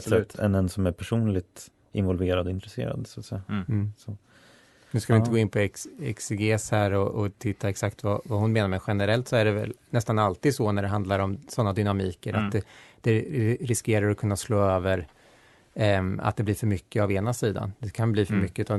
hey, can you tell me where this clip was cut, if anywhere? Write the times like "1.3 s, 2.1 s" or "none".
none